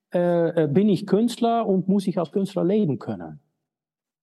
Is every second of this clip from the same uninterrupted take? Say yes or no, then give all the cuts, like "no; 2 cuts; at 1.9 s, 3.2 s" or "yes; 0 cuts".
yes; 0 cuts